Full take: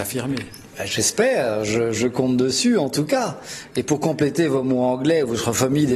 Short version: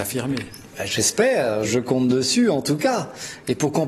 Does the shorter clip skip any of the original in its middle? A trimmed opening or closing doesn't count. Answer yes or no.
yes